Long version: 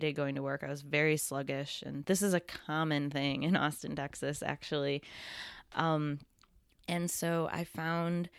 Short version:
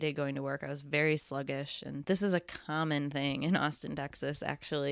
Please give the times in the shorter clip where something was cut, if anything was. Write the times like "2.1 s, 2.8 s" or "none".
none